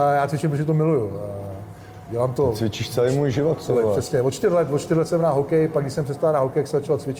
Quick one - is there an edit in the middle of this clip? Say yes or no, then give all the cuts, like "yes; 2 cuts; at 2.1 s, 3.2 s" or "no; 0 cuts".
no; 0 cuts